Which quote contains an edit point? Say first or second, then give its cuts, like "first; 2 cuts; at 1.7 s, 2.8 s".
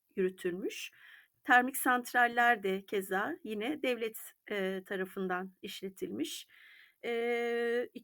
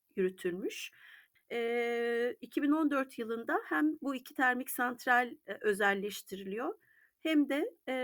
second; 1 cut; at 1.4 s